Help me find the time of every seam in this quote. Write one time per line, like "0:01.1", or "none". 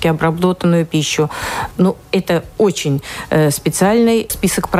0:01.7